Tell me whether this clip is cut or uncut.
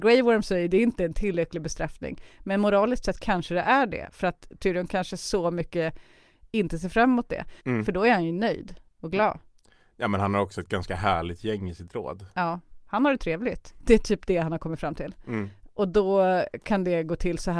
cut